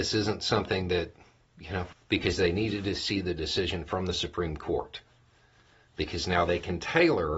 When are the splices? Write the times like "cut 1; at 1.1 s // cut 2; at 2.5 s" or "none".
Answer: cut 1; at 1.9 s